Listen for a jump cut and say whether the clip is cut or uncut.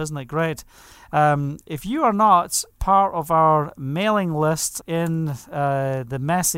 cut